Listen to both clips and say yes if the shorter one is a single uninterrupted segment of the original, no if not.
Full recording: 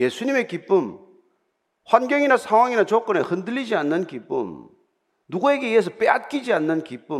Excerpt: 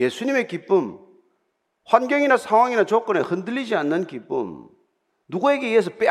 yes